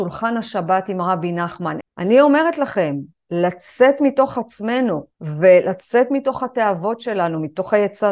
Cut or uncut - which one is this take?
cut